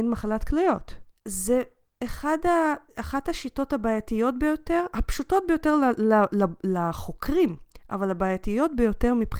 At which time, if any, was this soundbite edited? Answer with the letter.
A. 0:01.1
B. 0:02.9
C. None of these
A